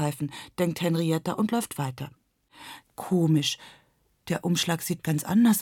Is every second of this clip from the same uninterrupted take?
no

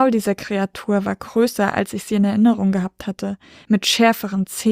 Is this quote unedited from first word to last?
yes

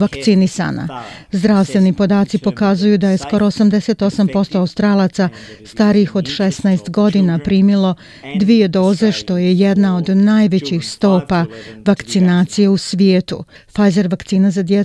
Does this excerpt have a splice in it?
yes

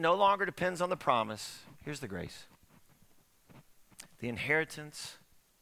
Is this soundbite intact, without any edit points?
no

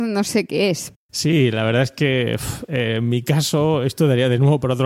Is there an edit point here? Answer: yes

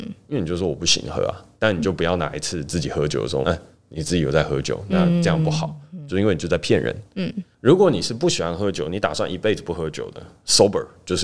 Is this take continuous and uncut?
no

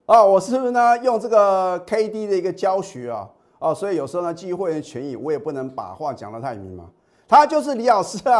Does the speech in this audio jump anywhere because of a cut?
no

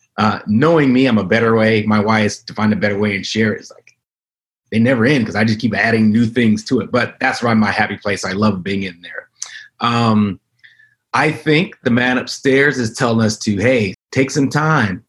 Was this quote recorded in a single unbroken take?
no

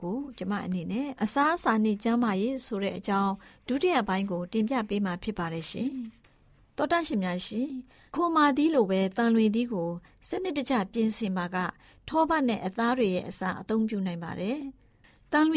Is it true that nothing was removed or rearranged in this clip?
no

